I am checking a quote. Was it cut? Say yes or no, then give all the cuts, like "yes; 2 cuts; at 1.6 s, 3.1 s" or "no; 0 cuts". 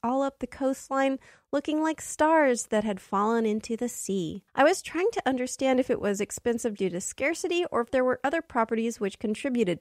yes; 2 cuts; at 4.5 s, 6.8 s